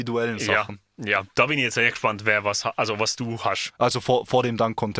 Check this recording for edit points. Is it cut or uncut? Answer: cut